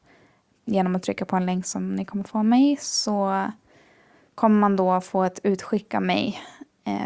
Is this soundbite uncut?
yes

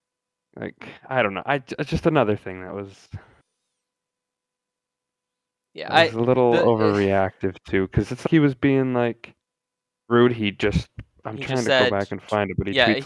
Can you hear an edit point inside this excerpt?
yes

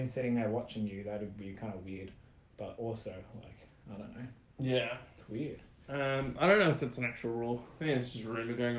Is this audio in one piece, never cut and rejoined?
yes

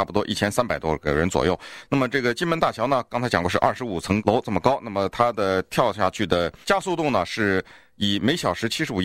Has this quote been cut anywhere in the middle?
no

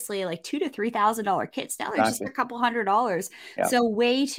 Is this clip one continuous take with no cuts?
yes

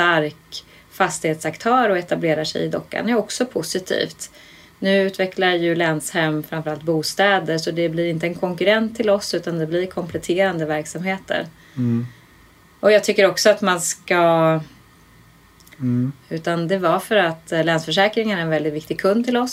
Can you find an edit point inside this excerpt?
yes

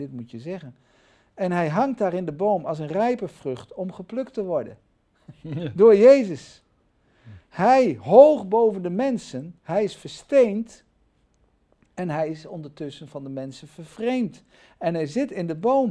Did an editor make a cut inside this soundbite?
yes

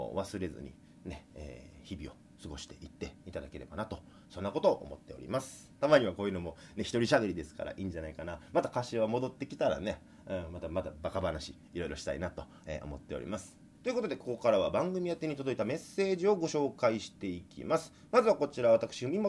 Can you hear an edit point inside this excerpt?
yes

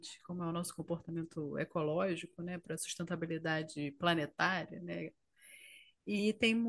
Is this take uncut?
yes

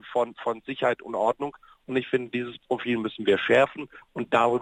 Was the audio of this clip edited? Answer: no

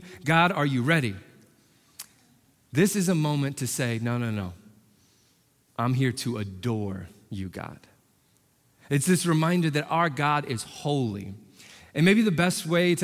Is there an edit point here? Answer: no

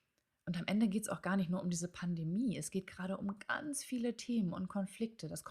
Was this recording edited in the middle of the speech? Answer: no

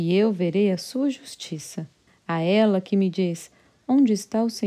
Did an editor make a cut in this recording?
yes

